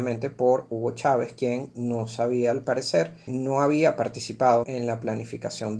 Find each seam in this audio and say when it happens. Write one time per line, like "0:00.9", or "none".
0:03.3
0:04.6